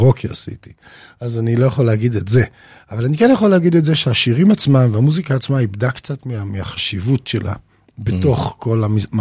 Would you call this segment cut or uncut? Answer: uncut